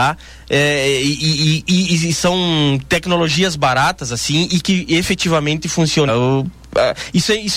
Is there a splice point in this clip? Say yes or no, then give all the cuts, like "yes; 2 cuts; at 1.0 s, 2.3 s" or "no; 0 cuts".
yes; 1 cut; at 6.1 s